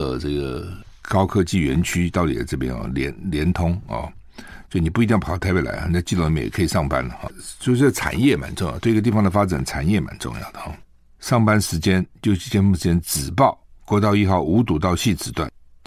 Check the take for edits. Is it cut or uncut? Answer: uncut